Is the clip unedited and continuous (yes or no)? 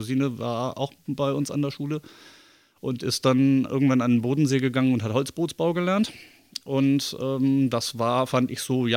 yes